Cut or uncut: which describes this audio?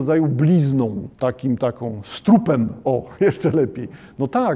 cut